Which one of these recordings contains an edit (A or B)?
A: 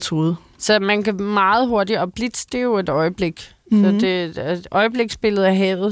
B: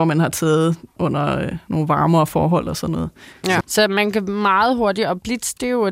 B